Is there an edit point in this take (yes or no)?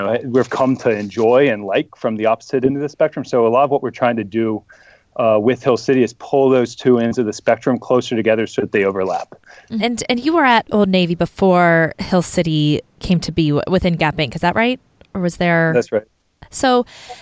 yes